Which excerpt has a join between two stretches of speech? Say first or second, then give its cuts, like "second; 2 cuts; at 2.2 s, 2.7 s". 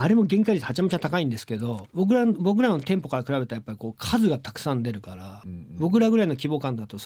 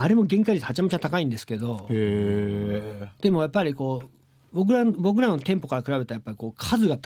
first; 1 cut; at 1.8 s